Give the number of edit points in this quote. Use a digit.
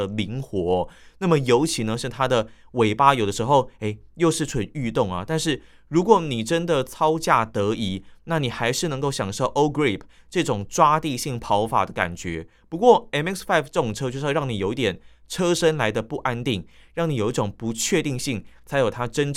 1